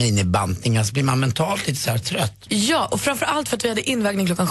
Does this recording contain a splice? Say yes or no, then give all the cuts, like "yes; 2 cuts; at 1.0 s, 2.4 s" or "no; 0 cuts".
no; 0 cuts